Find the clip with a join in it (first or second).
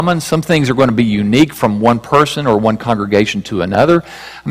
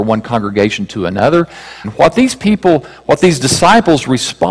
second